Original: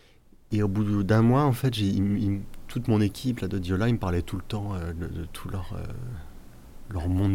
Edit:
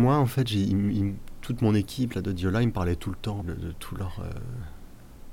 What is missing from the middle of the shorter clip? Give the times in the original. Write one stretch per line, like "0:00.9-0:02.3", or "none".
0:04.7-0:04.9

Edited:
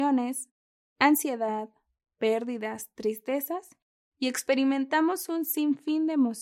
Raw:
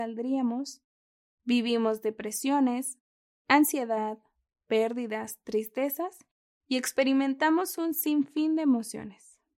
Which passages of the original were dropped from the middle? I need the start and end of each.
none

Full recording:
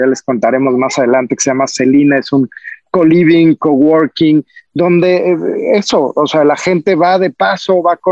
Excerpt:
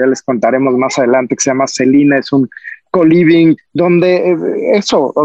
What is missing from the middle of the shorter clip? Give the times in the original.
0:03.6-0:04.6

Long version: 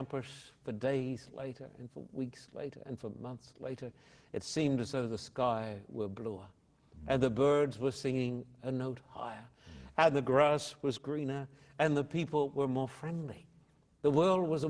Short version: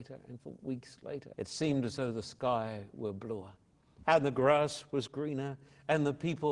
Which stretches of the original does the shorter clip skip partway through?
0:02.8-0:04.3
0:07.0-0:09.9

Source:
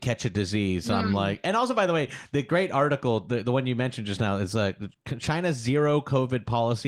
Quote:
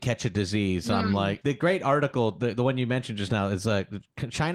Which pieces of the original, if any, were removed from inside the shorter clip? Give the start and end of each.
0:01.4-0:02.3

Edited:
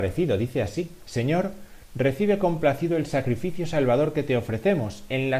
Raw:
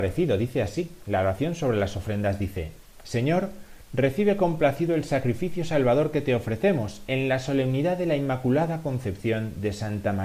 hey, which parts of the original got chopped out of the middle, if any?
0:01.0-0:03.0

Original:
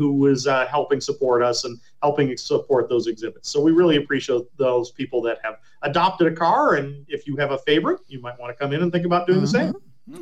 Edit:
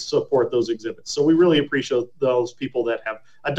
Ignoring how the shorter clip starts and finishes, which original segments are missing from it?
none

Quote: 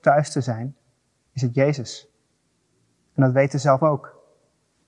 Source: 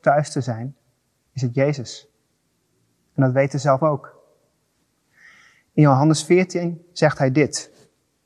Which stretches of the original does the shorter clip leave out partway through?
none

